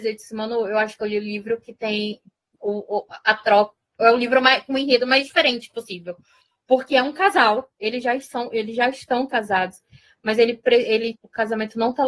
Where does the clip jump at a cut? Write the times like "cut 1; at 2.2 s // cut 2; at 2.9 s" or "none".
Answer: cut 1; at 11.1 s